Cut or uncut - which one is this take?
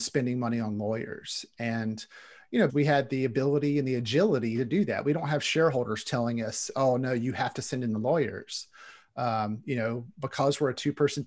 cut